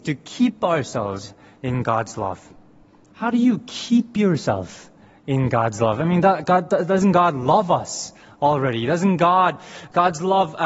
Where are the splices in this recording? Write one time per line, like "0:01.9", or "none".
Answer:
0:03.1